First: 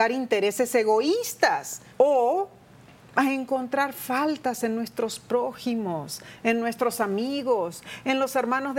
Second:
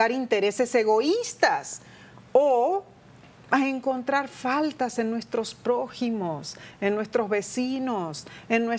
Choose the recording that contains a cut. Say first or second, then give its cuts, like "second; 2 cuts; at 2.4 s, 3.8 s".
first; 2 cuts; at 1.9 s, 6.4 s